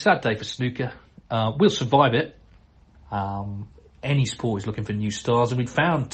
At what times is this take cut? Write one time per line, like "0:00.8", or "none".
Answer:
0:02.9